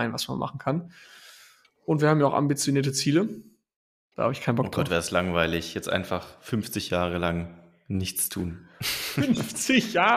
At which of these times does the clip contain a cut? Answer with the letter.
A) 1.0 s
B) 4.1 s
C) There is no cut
B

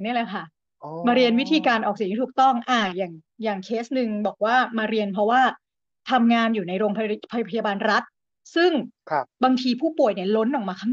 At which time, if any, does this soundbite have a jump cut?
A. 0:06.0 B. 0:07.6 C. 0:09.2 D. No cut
C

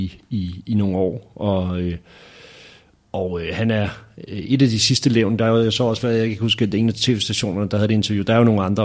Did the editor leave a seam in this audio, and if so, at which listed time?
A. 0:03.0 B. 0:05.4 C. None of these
C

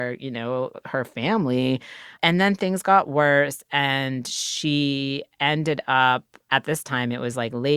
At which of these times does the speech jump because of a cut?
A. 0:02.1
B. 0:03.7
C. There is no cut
A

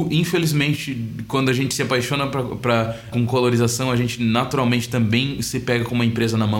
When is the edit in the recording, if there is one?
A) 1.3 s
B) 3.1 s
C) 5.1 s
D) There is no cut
B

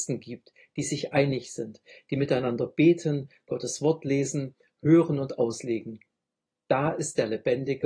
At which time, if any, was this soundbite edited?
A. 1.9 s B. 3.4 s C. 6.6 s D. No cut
D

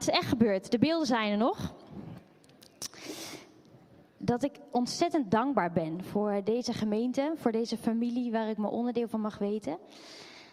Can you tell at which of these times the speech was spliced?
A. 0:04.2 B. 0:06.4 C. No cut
A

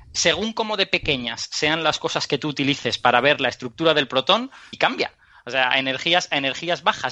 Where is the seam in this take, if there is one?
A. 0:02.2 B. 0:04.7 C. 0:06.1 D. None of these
B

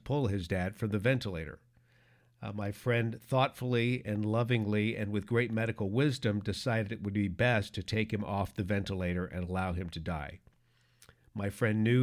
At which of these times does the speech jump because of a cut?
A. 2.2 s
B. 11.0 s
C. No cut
C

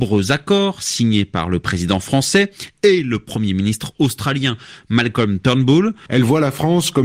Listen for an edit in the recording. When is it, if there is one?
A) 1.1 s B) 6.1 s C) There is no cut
B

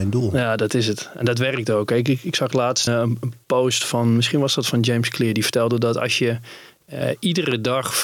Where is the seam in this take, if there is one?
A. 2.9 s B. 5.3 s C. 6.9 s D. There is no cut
A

